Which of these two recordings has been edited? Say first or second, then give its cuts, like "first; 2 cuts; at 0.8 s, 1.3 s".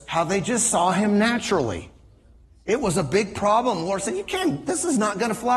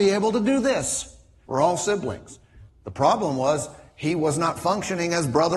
second; 2 cuts; at 1.4 s, 2.7 s